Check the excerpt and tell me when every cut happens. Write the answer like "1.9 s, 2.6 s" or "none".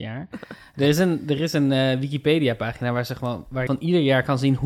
3.7 s